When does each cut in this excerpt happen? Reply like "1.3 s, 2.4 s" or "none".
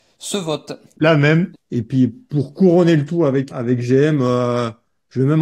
1.5 s, 3.5 s